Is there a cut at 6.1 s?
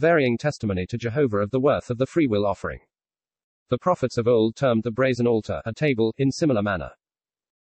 yes; 2 cuts; at 3.6 s, 6.1 s

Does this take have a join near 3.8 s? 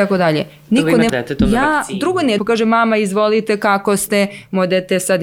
no; 2 cuts; at 1.1 s, 2.4 s

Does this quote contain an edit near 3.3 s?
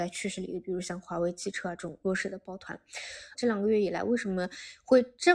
yes; 1 cut; at 3.3 s

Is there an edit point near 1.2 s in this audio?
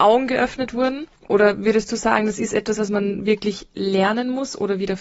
yes; 1 cut; at 1.2 s

